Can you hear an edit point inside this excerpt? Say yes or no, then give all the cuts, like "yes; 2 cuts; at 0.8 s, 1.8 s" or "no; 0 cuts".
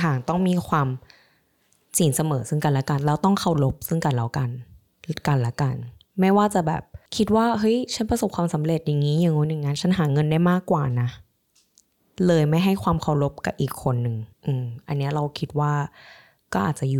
yes; 2 cuts; at 7.1 s, 14.3 s